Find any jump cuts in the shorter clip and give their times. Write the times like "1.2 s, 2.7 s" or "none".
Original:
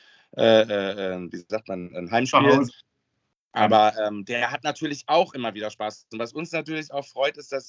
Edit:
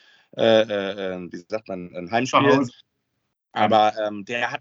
none